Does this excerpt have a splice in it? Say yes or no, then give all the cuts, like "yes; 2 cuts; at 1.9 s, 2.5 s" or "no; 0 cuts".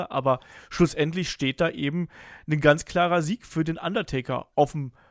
no; 0 cuts